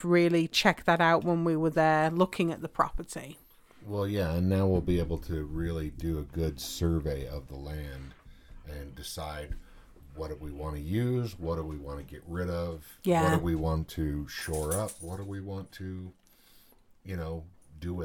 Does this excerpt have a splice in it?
no; 0 cuts

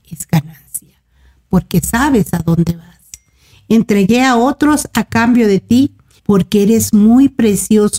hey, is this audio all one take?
no; 2 cuts; at 3.5 s, 6.2 s

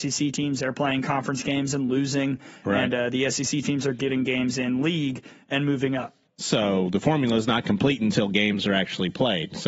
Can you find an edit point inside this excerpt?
yes; 1 cut; at 6.2 s

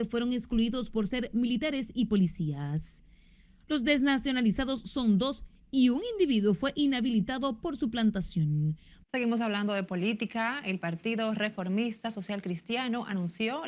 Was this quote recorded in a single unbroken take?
no; 1 cut; at 9.0 s

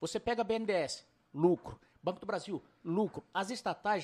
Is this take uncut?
yes; 0 cuts

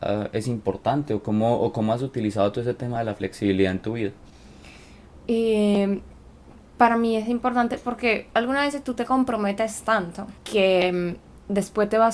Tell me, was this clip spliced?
yes; 2 cuts; at 5.1 s, 10.4 s

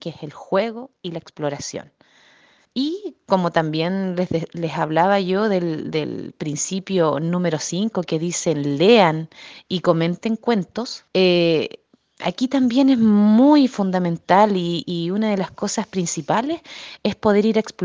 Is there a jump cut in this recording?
yes; 3 cuts; at 2.7 s, 11.1 s, 14.8 s

